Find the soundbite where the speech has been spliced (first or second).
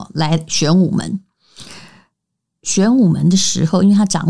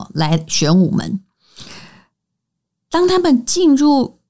first